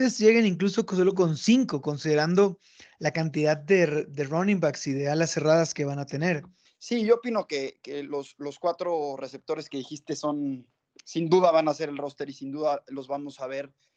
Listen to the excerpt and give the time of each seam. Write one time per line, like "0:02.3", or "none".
0:06.7